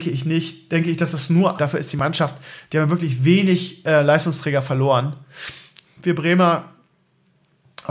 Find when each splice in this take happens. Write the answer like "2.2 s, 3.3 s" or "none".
1.6 s, 5.9 s